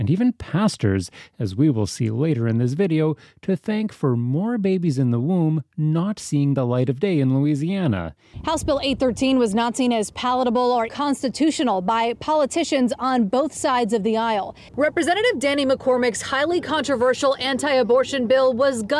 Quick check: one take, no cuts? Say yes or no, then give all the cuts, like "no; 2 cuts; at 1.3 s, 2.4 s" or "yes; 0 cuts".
no; 2 cuts; at 10.9 s, 14.7 s